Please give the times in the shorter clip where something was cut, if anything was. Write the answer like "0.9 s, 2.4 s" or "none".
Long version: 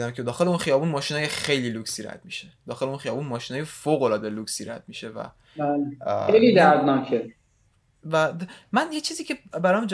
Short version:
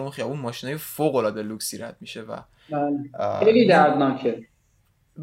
none